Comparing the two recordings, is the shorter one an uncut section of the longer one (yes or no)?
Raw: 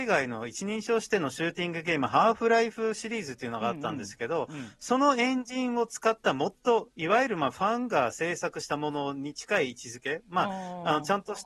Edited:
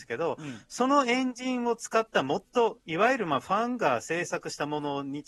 yes